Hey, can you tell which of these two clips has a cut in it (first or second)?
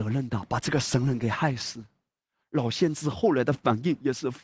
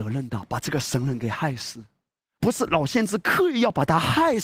second